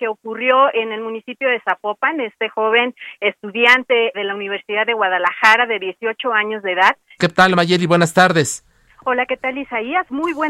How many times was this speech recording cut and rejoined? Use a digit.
2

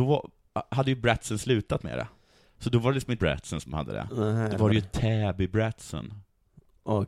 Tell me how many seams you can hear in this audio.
1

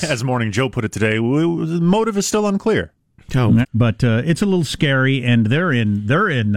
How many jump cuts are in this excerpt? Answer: 1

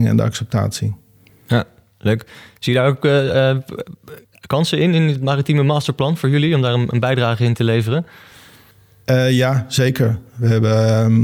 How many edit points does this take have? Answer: 0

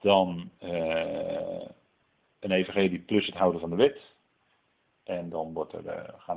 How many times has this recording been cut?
0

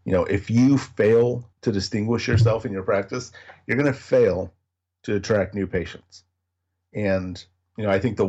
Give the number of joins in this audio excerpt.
1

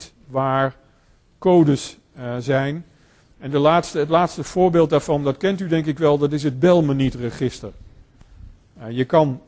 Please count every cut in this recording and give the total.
0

